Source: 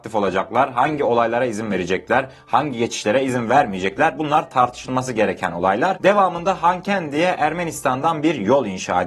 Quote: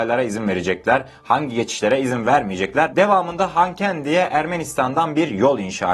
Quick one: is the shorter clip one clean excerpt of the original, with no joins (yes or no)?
no